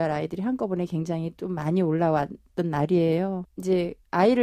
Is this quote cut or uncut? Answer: cut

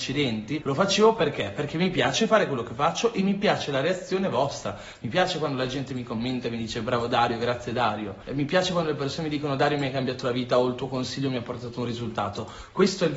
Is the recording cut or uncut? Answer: uncut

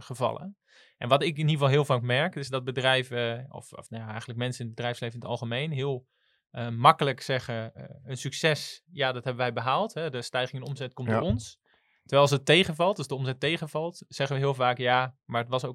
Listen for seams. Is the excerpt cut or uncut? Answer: uncut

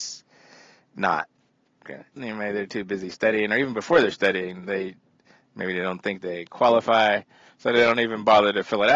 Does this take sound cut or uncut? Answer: cut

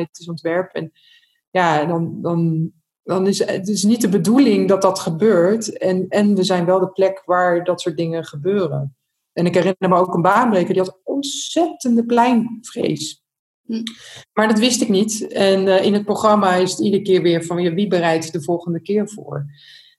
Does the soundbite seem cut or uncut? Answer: uncut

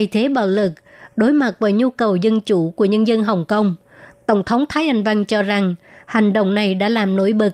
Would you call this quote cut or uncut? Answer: uncut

